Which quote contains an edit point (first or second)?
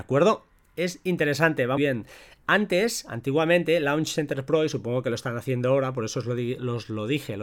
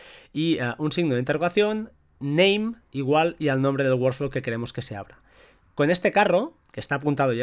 first